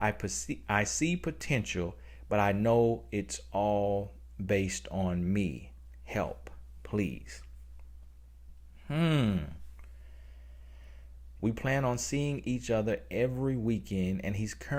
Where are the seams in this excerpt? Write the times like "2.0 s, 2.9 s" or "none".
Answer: 11.4 s